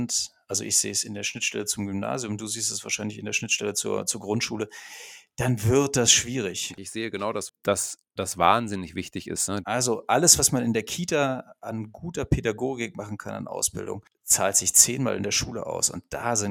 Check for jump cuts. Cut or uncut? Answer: cut